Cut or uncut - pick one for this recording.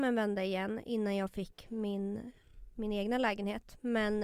uncut